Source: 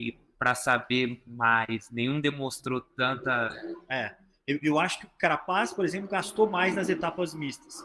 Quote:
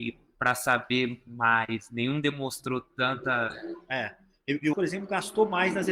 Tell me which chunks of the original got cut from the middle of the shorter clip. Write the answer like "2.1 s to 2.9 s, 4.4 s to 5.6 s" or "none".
4.7 s to 5.7 s